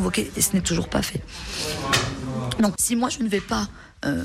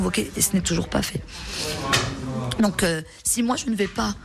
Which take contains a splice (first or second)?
first